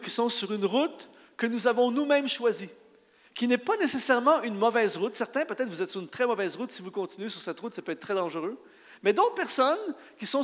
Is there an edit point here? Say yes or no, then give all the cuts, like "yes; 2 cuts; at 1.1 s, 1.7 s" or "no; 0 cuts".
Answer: no; 0 cuts